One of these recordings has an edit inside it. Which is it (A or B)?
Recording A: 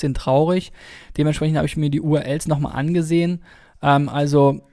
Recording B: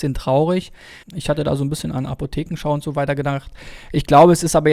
B